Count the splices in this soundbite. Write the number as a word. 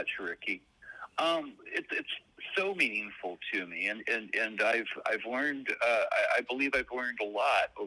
one